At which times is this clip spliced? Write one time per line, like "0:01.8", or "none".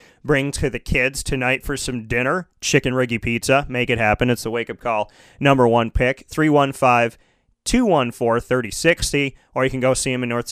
none

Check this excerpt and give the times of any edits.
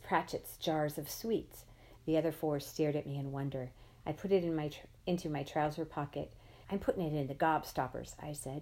0:02.0
0:04.0
0:06.6

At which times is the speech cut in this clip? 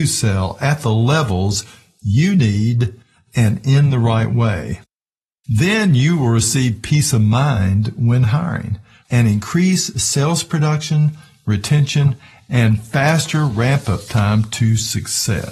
0:09.0

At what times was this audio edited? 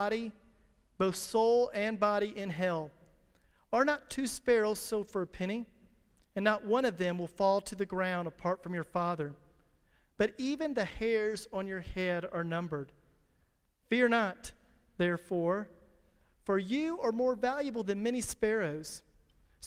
none

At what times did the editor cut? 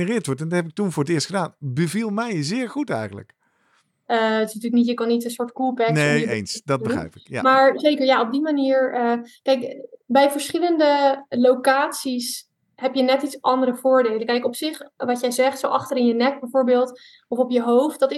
0:04.1

